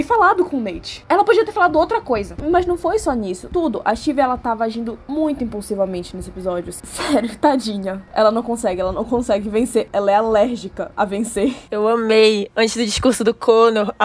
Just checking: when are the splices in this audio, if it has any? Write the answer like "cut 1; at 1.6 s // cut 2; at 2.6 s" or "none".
cut 1; at 6.8 s